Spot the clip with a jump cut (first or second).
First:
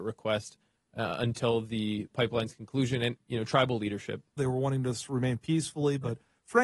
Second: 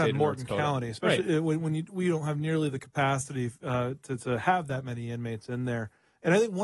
first